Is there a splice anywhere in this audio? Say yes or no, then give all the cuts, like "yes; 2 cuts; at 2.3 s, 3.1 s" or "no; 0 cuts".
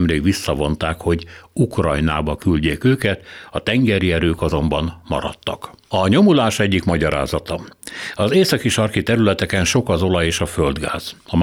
no; 0 cuts